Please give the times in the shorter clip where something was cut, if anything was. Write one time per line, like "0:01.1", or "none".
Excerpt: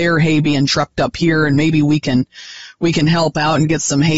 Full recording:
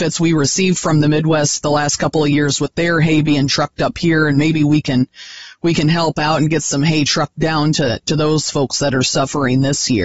none